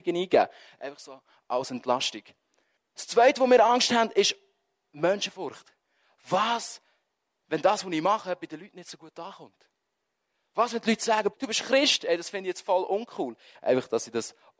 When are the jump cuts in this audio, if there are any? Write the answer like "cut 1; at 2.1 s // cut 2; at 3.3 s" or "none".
cut 1; at 11.3 s // cut 2; at 13.5 s